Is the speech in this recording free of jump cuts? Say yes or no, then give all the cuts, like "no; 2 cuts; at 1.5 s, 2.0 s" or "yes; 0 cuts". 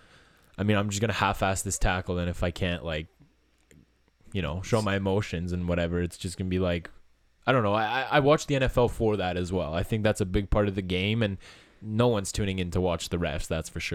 yes; 0 cuts